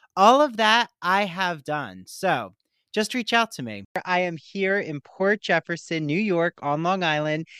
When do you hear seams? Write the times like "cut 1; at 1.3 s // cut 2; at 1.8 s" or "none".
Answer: none